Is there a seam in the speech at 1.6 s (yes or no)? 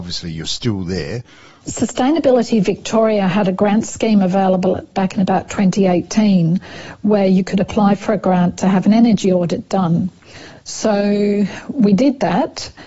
yes